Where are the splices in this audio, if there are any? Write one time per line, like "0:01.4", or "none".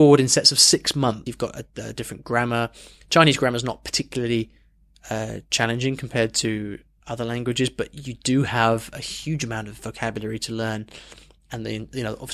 0:01.3